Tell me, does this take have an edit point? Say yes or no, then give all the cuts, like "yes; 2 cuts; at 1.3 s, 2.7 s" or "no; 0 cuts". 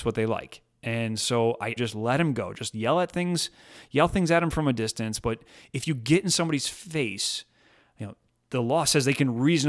yes; 1 cut; at 1.8 s